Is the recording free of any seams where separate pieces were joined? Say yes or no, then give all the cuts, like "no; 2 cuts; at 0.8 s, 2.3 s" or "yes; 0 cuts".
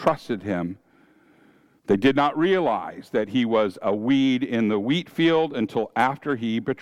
yes; 0 cuts